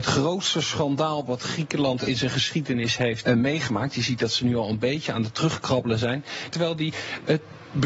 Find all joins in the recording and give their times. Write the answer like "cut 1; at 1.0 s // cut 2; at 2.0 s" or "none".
cut 1; at 3.2 s // cut 2; at 6.5 s